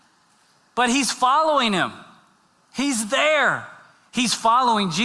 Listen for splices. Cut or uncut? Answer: cut